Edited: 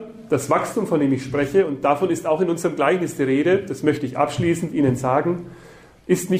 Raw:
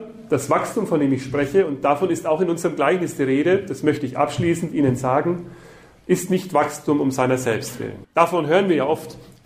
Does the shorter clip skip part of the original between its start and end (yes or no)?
no